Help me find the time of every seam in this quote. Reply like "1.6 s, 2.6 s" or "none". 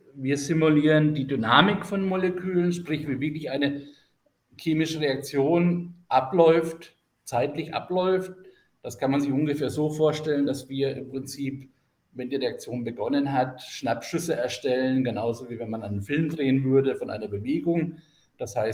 none